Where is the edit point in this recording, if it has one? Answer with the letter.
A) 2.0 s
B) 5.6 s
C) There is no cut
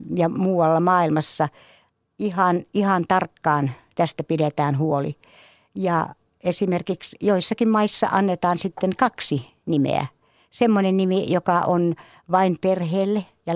C